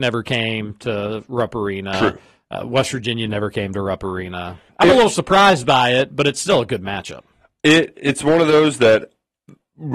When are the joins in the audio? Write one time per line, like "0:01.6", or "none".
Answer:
0:04.7

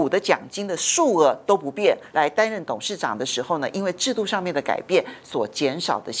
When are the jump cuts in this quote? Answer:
0:02.1

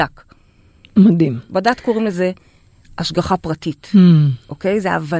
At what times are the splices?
none

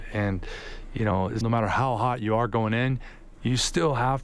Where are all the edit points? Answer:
0:01.4

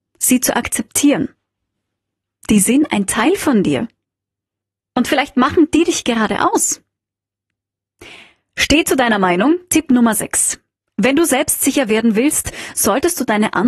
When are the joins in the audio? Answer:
none

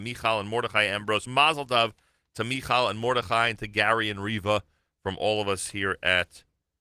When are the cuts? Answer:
none

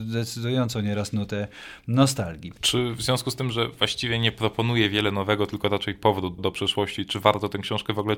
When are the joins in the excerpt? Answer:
0:06.4

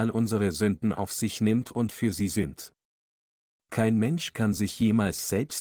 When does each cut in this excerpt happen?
none

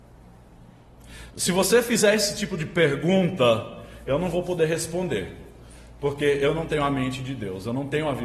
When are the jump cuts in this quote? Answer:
0:01.3

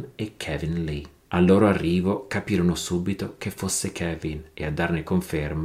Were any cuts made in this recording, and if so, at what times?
0:01.2

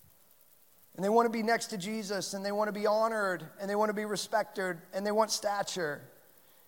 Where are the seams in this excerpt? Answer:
none

